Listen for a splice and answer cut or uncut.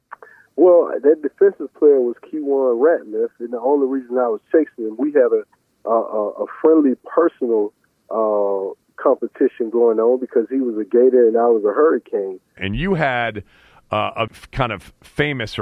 cut